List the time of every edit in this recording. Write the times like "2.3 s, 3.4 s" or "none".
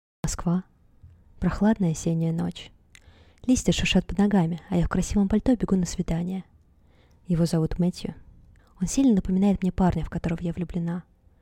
8.6 s